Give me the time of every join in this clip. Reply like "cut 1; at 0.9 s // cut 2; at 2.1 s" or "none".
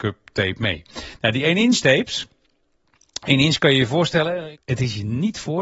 cut 1; at 4.5 s